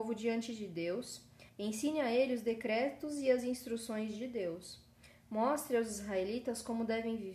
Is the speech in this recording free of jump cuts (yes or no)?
no